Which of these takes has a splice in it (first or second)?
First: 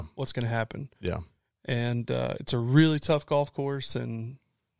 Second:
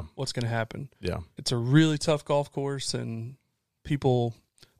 second